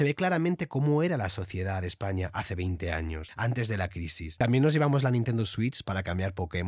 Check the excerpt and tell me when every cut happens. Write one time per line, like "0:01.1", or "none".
0:04.4